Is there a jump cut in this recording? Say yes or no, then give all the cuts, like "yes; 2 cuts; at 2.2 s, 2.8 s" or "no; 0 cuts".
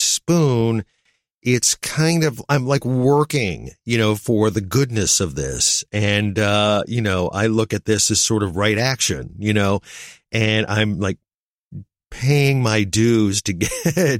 no; 0 cuts